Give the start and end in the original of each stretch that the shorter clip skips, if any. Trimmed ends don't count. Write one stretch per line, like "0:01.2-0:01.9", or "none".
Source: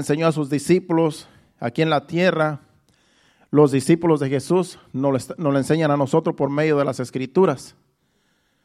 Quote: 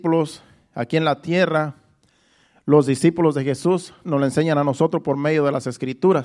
0:04.9-0:05.4